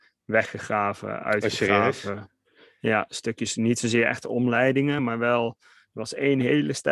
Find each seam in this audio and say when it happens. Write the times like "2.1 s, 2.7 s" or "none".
none

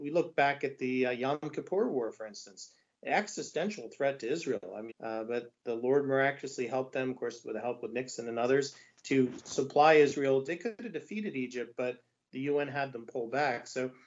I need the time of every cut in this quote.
4.9 s, 10.5 s

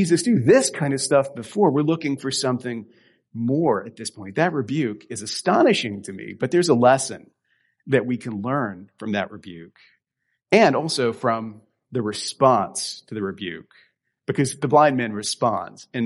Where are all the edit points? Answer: none

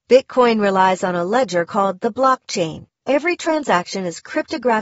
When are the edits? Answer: 2.9 s

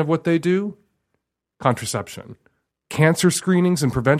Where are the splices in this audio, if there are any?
2.7 s

